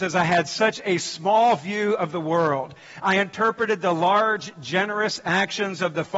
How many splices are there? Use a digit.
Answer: 0